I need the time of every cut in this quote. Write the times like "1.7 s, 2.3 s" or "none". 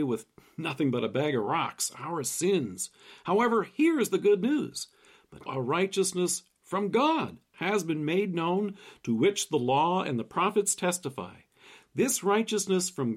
5.5 s, 7.5 s